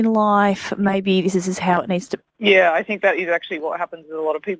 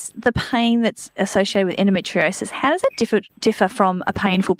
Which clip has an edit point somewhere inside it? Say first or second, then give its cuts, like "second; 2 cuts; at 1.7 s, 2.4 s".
first; 1 cut; at 2.2 s